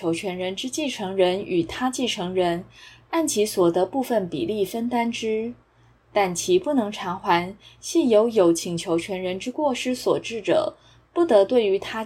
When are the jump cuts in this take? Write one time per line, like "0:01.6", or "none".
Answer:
none